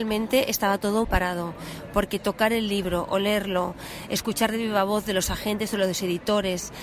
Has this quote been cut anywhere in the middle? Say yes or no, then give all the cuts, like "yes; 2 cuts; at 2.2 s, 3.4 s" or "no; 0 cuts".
yes; 1 cut; at 1.0 s